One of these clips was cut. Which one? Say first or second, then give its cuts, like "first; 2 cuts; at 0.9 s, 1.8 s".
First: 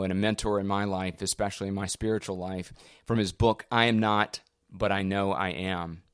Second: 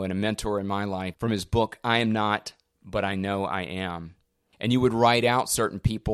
second; 2 cuts; at 1.1 s, 4.5 s